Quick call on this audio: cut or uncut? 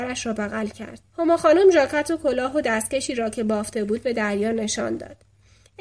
cut